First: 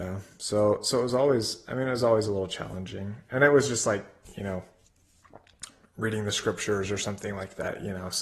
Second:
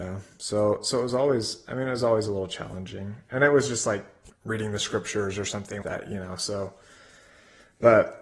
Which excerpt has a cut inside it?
second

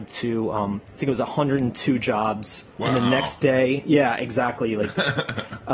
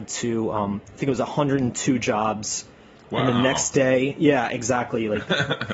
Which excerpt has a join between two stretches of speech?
first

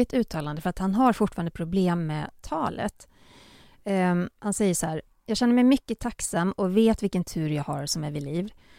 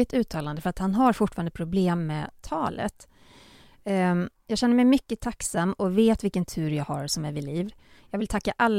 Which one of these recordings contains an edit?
second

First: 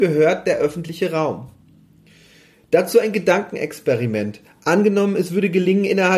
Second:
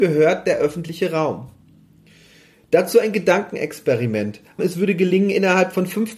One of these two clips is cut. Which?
second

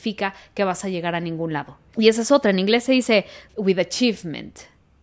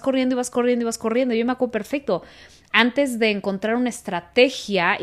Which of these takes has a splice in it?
first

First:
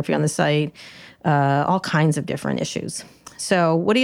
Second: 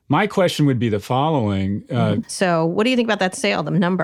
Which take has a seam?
second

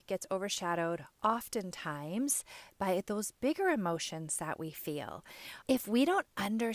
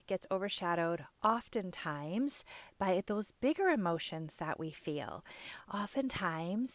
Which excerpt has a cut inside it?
first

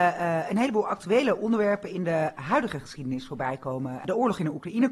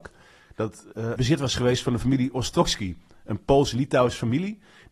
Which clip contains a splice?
second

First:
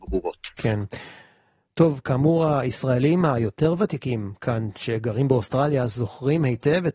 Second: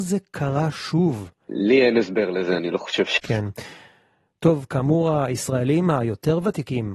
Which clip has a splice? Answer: second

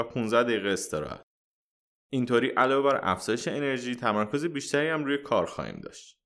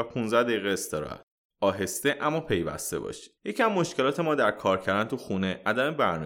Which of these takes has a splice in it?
second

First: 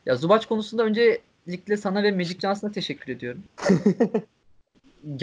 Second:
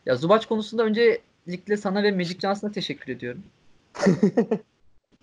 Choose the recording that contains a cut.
first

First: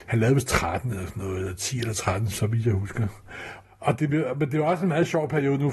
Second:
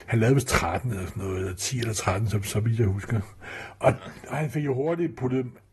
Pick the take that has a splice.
first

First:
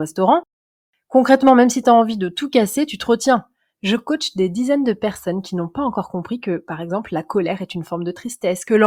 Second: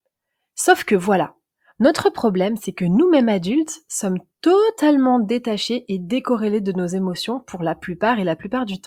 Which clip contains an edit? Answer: first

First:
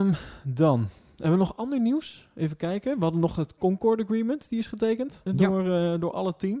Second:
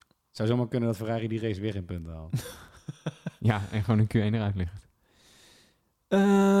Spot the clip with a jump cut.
first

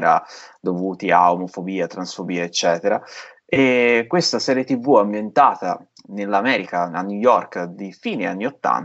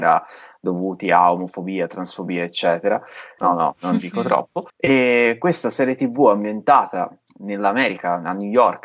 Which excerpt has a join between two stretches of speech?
second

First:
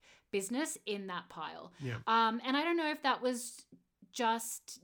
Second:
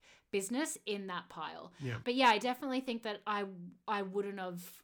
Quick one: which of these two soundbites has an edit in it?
second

